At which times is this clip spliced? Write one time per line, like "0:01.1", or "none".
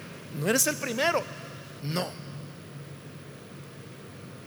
0:01.8